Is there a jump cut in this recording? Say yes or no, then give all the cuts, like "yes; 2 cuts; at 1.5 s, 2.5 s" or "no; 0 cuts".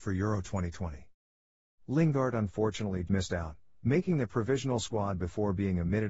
yes; 1 cut; at 3.1 s